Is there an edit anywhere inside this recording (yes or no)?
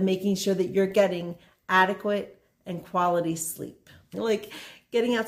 yes